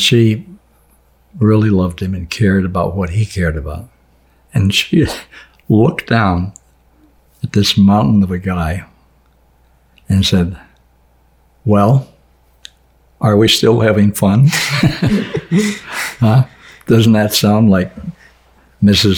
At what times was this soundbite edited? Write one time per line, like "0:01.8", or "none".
none